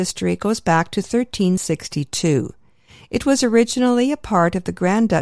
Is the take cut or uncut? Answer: uncut